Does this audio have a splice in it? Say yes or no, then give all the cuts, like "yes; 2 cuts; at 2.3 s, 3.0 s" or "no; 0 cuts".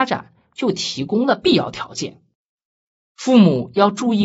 no; 0 cuts